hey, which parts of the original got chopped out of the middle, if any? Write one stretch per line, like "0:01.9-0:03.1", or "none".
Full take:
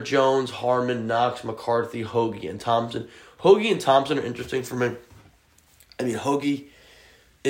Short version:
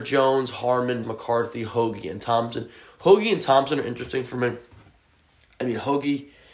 0:01.0-0:01.4